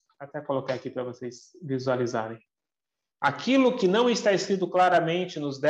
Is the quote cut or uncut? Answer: cut